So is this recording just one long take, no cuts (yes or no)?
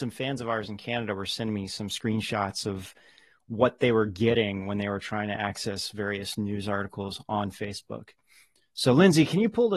yes